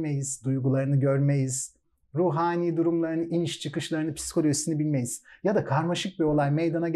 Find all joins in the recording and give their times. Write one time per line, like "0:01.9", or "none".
none